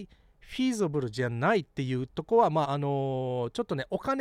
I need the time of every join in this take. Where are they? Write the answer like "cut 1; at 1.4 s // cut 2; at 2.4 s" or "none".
cut 1; at 2.6 s

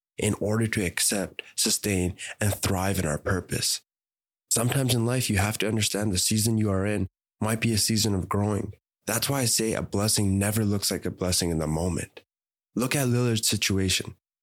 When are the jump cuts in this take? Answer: cut 1; at 8.9 s

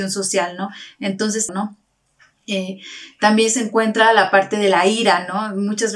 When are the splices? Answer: cut 1; at 1.5 s

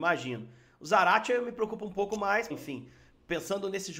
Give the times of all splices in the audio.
cut 1; at 2.5 s

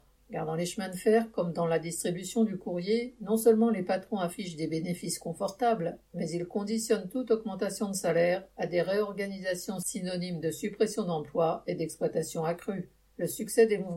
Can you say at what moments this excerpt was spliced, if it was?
none

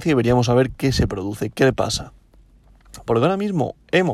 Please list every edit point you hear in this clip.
cut 1; at 3.1 s

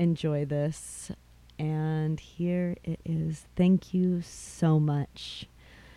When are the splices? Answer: none

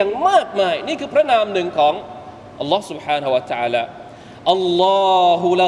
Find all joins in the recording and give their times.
none

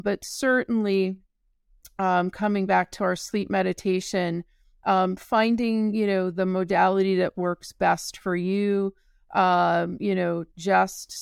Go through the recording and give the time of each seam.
none

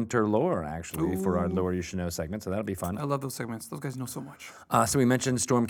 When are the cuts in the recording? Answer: none

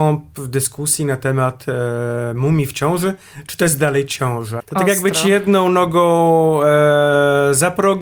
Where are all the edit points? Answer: cut 1; at 4.6 s

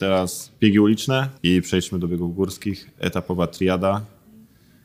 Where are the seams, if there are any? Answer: cut 1; at 1.4 s

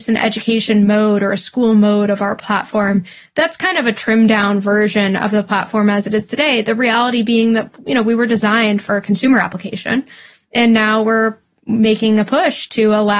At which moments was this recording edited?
none

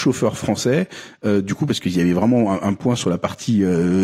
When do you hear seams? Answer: none

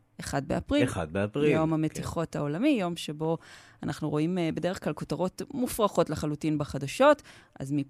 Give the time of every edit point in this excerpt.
none

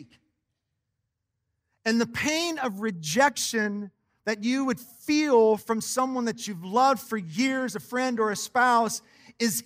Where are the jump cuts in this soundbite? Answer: none

